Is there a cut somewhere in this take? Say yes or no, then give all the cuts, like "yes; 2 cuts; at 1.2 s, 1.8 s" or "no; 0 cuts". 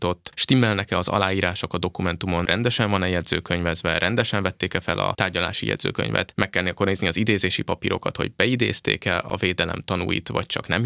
no; 0 cuts